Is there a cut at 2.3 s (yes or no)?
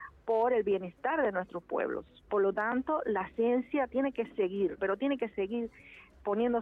yes